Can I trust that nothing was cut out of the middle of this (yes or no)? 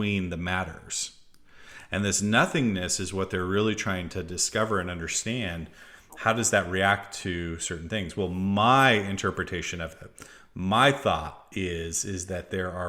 yes